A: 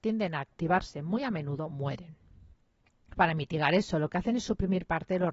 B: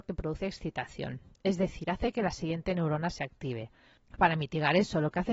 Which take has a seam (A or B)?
B